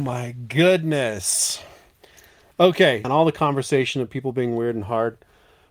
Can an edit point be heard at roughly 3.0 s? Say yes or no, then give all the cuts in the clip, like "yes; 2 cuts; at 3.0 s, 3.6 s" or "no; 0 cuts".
yes; 1 cut; at 3.0 s